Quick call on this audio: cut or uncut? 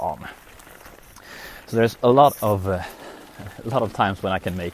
uncut